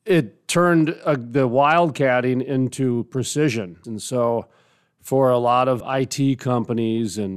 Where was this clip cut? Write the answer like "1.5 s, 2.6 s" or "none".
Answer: 3.8 s, 5.8 s

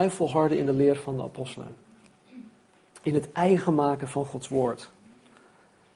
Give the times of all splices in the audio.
none

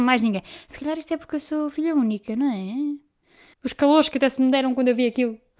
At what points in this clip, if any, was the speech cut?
3.5 s

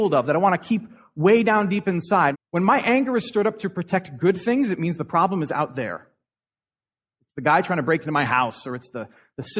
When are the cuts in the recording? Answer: 2.3 s

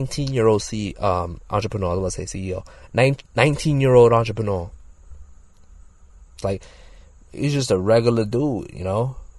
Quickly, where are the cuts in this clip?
6.4 s

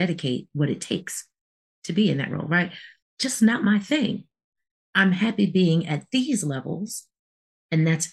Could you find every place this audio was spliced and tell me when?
3.0 s

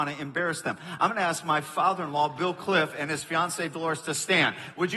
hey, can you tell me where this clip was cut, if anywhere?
none

